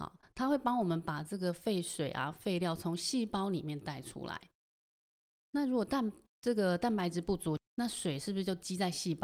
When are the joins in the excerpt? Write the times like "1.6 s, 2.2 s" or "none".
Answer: 7.6 s